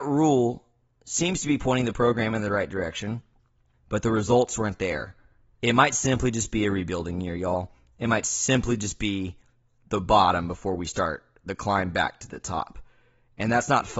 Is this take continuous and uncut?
no; 1 cut; at 3.7 s

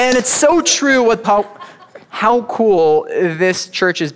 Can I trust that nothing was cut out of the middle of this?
no; 1 cut; at 1.2 s

